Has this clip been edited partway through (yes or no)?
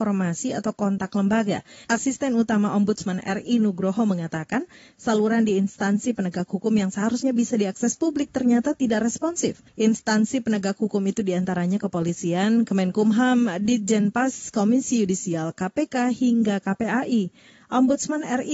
yes